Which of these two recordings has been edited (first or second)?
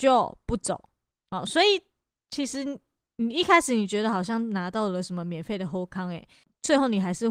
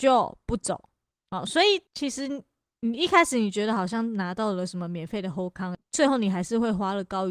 second